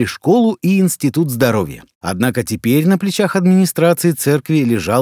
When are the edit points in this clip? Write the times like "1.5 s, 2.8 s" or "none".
1.9 s